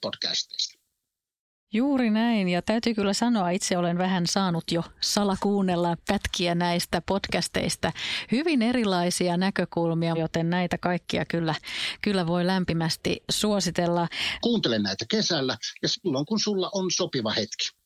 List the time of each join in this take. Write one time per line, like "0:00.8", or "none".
0:10.1
0:14.4